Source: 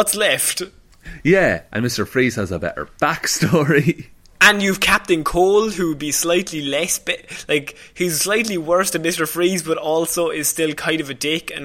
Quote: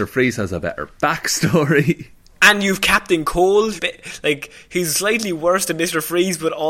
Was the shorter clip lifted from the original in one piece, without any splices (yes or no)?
no